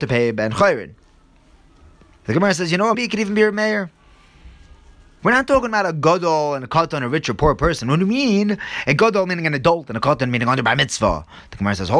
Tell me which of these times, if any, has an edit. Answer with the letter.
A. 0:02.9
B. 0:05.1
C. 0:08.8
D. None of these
A